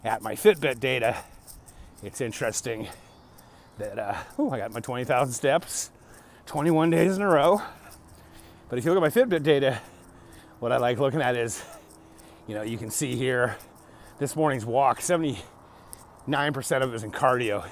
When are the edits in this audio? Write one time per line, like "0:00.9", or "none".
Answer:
none